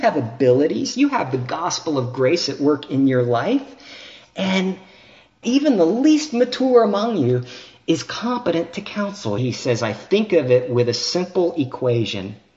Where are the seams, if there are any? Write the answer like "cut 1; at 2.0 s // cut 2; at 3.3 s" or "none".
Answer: cut 1; at 5.4 s // cut 2; at 9.4 s

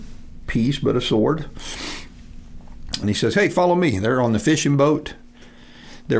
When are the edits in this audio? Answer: cut 1; at 3.0 s

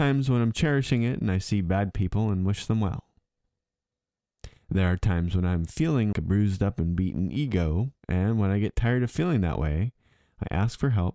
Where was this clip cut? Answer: cut 1; at 6.1 s // cut 2; at 8.0 s

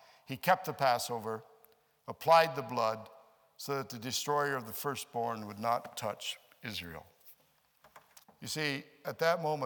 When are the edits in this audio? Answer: cut 1; at 8.2 s

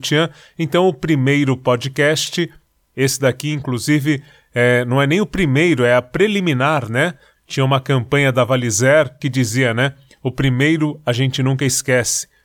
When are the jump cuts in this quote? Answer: cut 1; at 7.3 s // cut 2; at 9.2 s

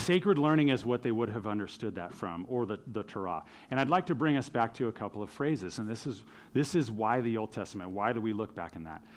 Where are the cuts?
none

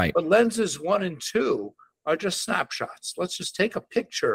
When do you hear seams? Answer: none

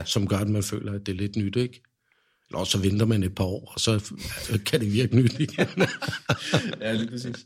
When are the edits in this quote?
none

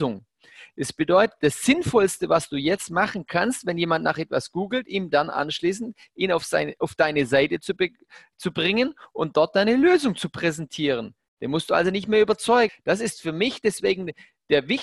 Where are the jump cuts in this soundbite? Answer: cut 1; at 12.7 s

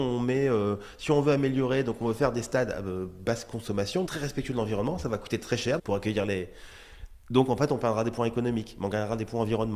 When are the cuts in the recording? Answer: cut 1; at 4.1 s // cut 2; at 5.8 s

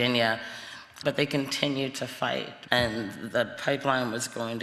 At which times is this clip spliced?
cut 1; at 1.0 s // cut 2; at 2.7 s

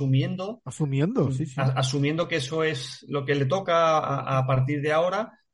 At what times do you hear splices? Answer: none

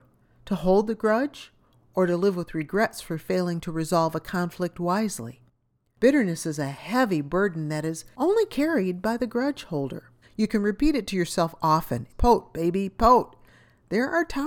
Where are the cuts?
cut 1; at 10.2 s // cut 2; at 12.1 s

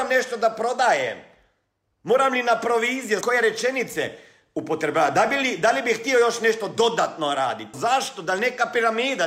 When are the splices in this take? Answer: cut 1; at 3.2 s // cut 2; at 7.7 s

